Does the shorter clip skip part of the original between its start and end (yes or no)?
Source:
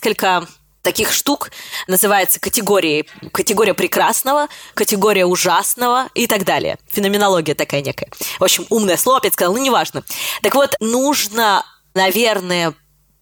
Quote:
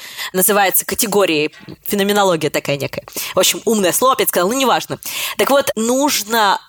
yes